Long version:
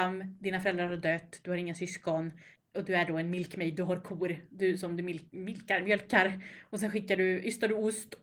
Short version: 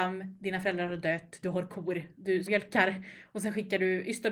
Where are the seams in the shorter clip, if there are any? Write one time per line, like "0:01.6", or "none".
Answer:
0:01.4
0:02.5